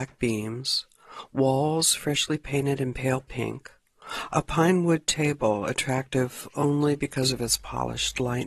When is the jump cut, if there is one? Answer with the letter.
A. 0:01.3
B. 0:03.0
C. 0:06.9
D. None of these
D